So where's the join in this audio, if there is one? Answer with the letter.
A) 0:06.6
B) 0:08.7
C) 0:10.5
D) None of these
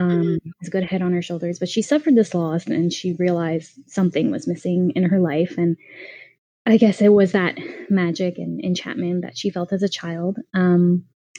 D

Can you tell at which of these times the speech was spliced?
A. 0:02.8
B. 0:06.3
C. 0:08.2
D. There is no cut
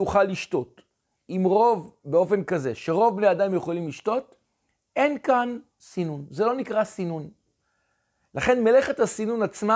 D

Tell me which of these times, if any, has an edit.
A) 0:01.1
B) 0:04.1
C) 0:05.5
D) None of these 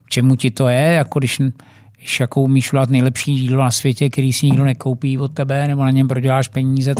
D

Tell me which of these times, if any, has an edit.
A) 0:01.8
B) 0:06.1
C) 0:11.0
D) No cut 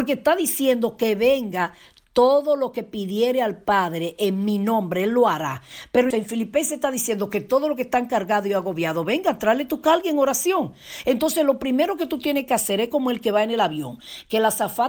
B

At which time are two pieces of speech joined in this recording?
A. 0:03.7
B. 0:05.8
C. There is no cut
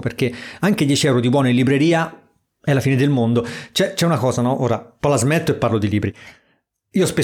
C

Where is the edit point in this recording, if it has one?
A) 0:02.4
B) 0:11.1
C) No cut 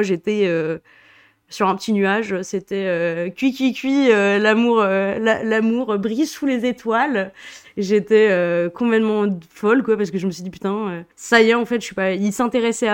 B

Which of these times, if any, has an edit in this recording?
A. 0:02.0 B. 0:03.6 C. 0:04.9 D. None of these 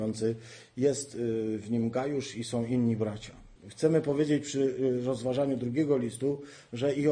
B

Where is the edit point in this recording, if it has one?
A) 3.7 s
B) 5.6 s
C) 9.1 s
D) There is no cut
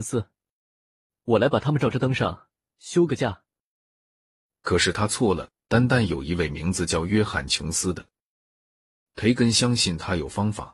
C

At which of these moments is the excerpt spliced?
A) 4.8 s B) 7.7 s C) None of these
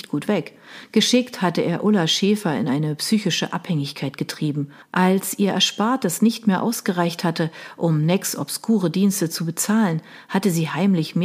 A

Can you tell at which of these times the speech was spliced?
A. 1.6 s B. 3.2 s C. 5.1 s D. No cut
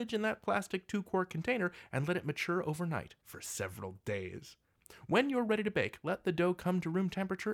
B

